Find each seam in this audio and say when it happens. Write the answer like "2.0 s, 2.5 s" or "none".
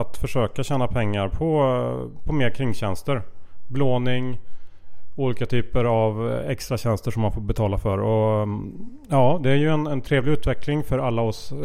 none